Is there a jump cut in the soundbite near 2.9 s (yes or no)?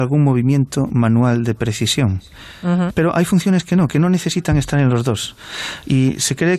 yes